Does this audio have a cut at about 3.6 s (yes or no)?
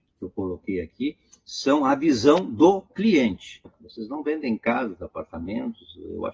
yes